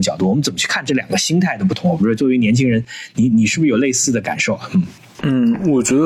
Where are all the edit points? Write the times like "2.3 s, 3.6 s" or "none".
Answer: 3.3 s